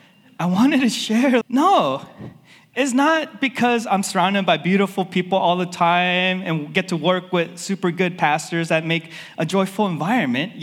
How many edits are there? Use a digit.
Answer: 1